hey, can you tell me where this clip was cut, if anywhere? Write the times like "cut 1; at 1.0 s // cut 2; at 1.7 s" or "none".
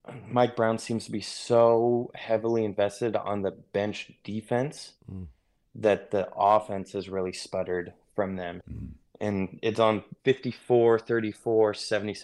cut 1; at 8.6 s // cut 2; at 10.2 s